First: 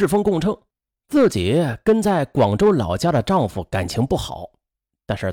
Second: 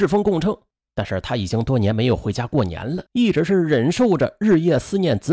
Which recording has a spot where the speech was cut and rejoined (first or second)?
second